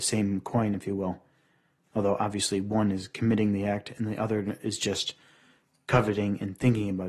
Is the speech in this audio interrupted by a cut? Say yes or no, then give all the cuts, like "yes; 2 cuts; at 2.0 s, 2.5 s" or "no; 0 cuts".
no; 0 cuts